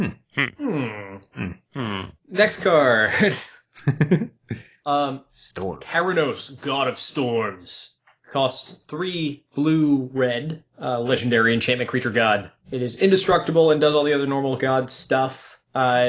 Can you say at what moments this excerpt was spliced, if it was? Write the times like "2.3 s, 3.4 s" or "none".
none